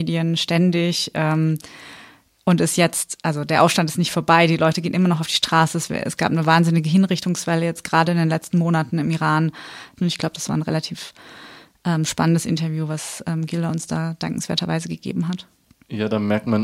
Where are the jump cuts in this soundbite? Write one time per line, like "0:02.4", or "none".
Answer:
0:10.0